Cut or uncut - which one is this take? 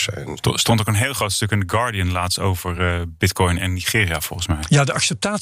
uncut